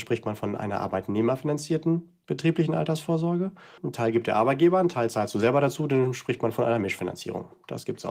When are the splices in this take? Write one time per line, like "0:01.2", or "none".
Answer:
0:03.8